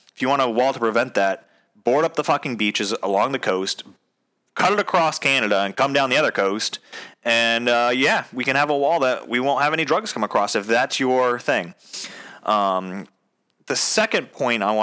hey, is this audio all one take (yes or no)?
yes